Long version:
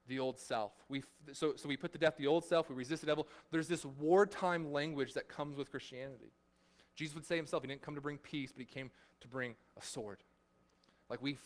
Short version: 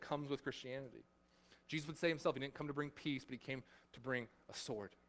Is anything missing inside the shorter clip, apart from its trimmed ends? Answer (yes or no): no